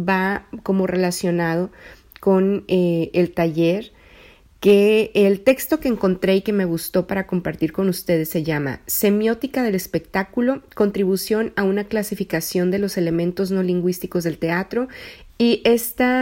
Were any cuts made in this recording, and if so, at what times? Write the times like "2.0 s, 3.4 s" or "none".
15.3 s